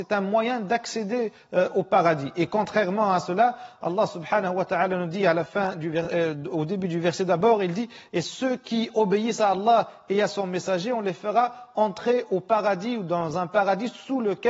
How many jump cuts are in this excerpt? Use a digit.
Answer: 0